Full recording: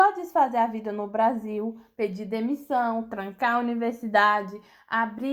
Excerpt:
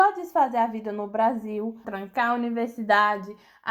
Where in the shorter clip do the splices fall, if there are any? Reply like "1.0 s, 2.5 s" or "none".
1.8 s